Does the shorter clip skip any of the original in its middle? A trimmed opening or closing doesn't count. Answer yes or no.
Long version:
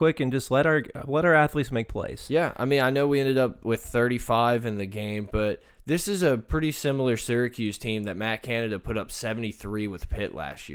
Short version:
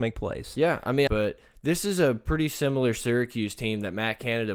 yes